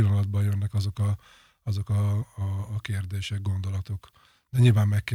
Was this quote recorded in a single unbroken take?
yes; 0 cuts

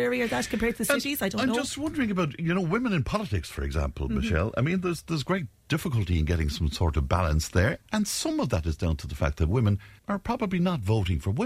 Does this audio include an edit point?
yes; 1 cut; at 10.0 s

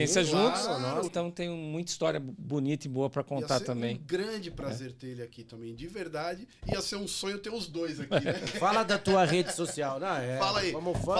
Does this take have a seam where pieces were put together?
yes; 1 cut; at 1.0 s

